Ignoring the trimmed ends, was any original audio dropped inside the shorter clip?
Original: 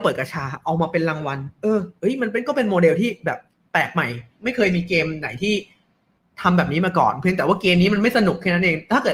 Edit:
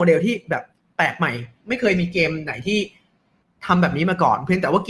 no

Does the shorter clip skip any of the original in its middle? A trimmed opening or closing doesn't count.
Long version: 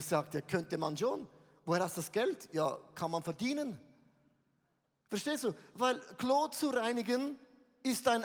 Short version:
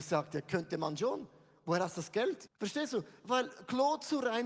yes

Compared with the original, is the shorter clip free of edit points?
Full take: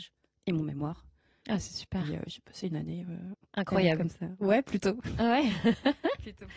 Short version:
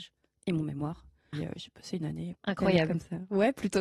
no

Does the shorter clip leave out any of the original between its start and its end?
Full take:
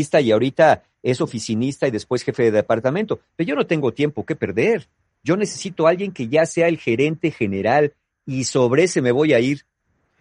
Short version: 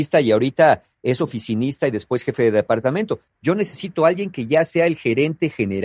yes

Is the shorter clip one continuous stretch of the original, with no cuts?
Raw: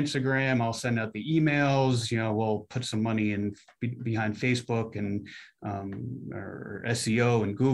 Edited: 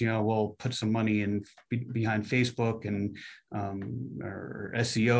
yes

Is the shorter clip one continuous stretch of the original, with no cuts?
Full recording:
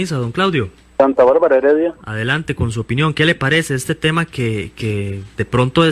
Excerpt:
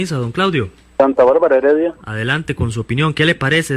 yes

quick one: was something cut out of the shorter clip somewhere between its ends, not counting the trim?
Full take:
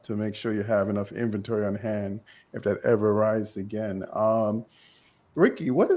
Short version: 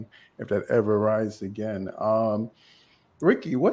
no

